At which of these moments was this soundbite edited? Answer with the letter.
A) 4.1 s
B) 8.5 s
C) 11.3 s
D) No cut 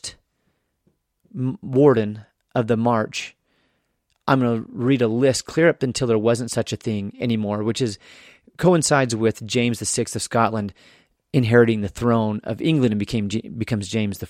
D